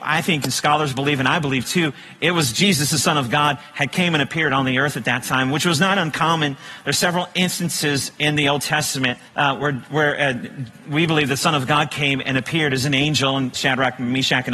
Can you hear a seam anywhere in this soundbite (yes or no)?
yes